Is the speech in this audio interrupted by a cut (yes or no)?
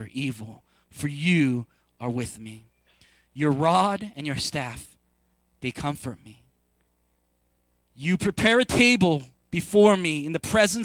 no